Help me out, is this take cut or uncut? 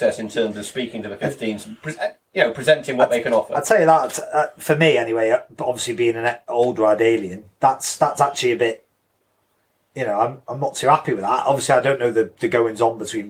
uncut